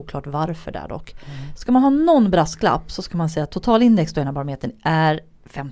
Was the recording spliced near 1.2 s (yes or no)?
no